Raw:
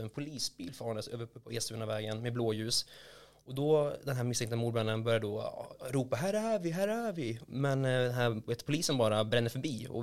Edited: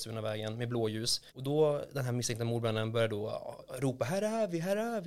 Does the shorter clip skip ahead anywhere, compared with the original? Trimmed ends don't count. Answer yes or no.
yes